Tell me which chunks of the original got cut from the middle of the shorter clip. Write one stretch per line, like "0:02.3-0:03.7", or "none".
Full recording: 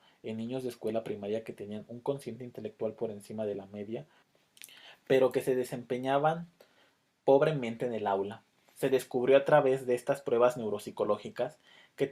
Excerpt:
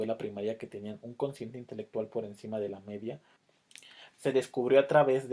0:05.0-0:08.7